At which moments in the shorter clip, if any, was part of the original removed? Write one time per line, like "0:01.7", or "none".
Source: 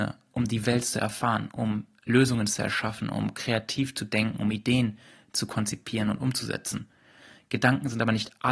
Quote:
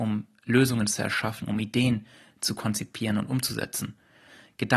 0:01.4